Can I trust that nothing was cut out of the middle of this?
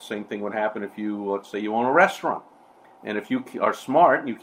yes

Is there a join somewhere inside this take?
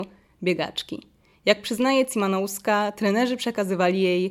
no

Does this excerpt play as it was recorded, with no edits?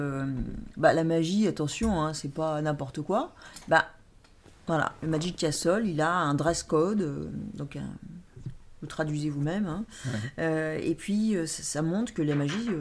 yes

